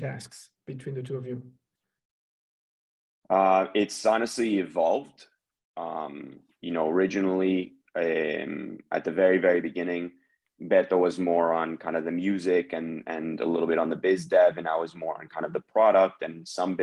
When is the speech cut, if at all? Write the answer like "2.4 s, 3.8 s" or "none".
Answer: none